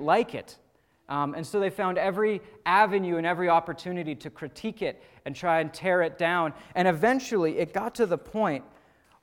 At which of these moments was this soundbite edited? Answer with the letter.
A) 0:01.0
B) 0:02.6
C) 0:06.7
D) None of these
D